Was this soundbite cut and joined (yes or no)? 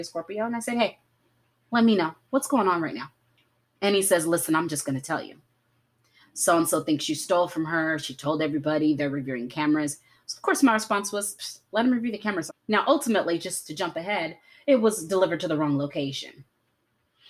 yes